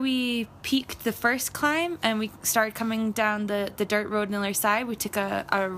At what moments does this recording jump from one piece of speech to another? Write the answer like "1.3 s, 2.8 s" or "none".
none